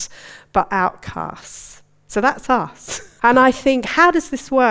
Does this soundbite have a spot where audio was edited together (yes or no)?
yes